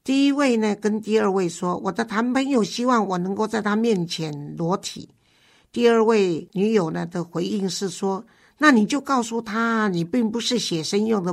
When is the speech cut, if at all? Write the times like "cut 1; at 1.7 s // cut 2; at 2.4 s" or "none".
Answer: none